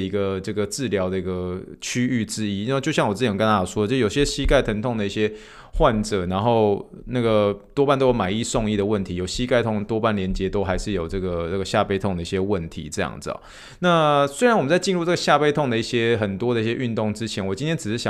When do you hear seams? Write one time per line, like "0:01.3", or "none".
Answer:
none